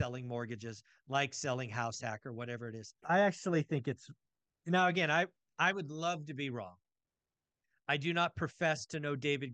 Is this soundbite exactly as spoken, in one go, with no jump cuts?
no; 1 cut; at 3.0 s

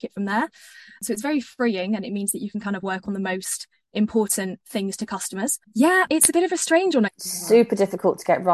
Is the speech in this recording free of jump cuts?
no; 2 cuts; at 5.6 s, 7.1 s

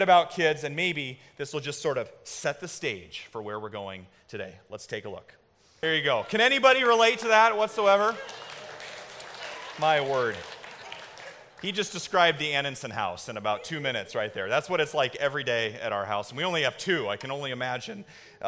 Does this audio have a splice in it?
no; 0 cuts

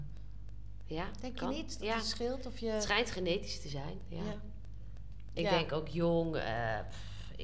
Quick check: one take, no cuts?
yes; 0 cuts

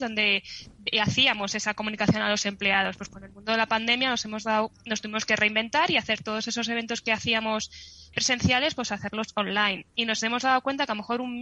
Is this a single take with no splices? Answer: no; 1 cut; at 8.1 s

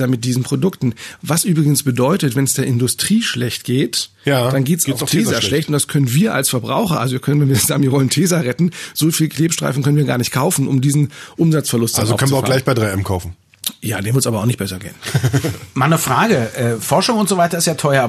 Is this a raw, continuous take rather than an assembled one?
yes; 0 cuts

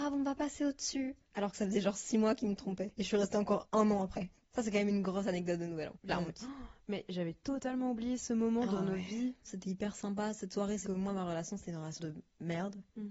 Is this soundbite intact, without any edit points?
no; 2 cuts; at 10.8 s, 12.0 s

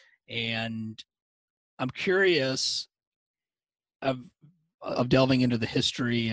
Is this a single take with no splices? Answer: no; 1 cut; at 4.9 s

